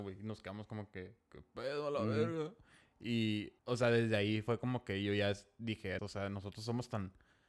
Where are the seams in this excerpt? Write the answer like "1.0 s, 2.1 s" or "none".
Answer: 3.6 s, 6.0 s